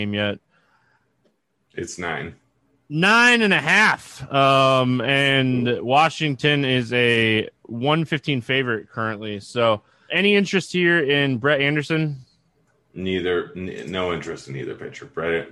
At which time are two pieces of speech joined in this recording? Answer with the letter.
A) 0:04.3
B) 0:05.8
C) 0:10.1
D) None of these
C